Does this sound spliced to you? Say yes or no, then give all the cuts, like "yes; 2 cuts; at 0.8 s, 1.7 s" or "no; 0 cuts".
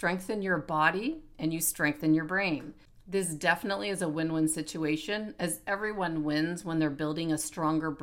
no; 0 cuts